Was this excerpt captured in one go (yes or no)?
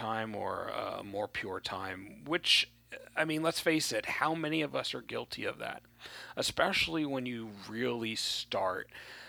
yes